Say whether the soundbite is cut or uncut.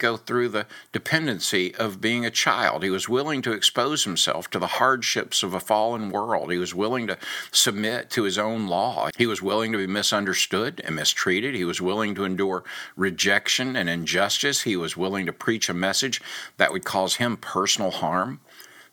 cut